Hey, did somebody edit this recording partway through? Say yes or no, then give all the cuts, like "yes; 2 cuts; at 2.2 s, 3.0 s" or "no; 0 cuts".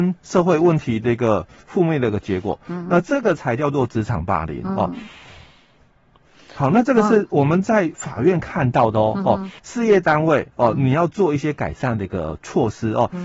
yes; 1 cut; at 9.6 s